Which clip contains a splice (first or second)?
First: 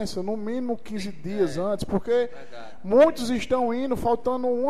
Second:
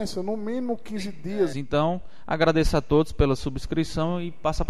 second